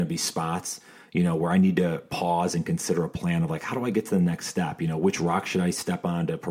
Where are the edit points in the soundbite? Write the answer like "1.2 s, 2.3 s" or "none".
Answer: none